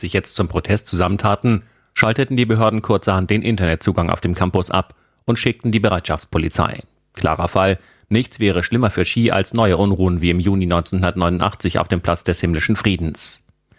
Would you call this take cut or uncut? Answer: uncut